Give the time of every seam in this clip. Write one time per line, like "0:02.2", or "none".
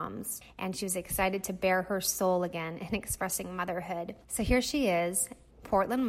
0:04.2